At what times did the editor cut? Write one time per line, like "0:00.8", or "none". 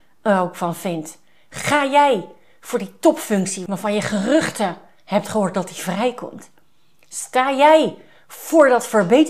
none